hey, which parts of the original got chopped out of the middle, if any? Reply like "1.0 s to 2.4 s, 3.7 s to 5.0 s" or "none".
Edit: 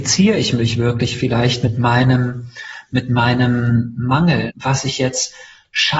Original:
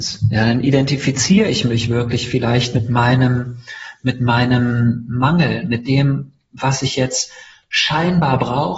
5.6 s to 6.5 s